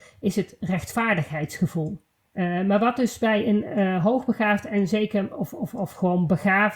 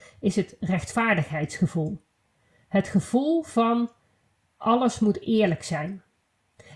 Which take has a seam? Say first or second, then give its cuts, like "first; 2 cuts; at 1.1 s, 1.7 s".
first; 1 cut; at 2.3 s